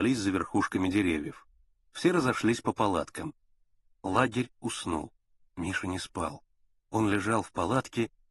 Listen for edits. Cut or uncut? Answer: uncut